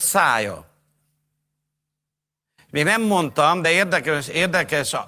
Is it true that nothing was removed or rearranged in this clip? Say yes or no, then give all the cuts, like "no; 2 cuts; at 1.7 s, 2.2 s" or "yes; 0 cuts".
yes; 0 cuts